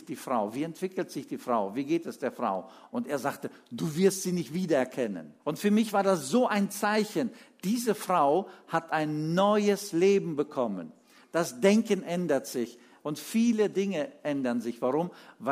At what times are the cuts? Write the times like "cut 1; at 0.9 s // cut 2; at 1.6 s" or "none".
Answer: cut 1; at 5.4 s // cut 2; at 12.9 s